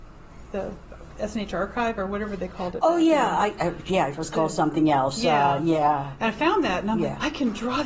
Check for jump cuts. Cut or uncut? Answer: uncut